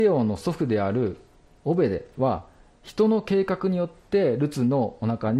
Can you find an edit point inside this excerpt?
no; 0 cuts

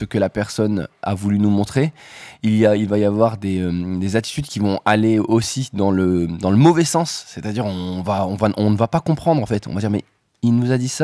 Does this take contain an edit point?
no; 0 cuts

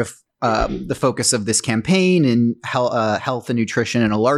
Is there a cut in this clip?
no; 0 cuts

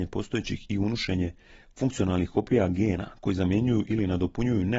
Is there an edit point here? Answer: no; 0 cuts

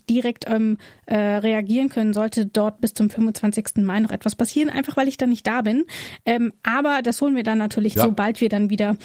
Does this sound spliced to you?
yes; 1 cut; at 8.0 s

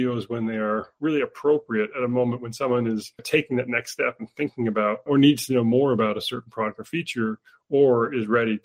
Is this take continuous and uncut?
yes; 0 cuts

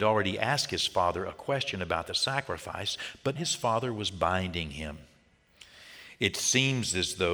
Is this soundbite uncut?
no; 1 cut; at 3.4 s

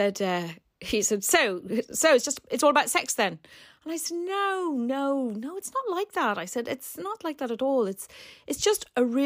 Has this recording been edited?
no; 0 cuts

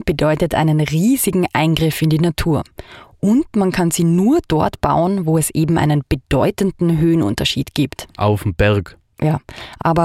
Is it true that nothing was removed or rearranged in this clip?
yes; 0 cuts

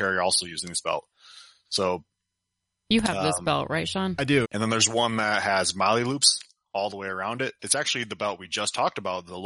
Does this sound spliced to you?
yes; 2 cuts; at 4.4 s, 7.6 s

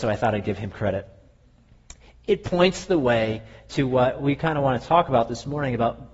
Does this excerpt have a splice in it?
no; 0 cuts

